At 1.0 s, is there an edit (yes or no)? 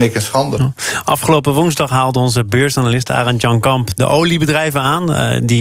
no